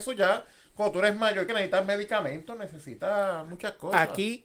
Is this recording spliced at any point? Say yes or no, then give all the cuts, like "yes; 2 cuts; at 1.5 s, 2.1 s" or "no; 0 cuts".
no; 0 cuts